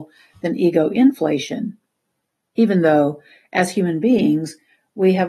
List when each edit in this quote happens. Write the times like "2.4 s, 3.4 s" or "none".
none